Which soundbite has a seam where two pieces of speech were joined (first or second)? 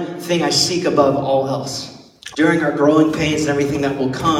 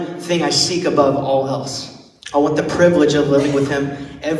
first